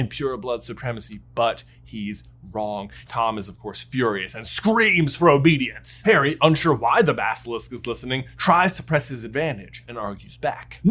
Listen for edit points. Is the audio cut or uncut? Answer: cut